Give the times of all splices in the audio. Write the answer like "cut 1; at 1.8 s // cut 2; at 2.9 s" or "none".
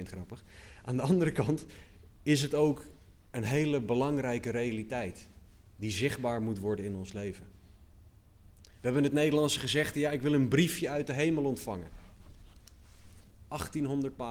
cut 1; at 8.6 s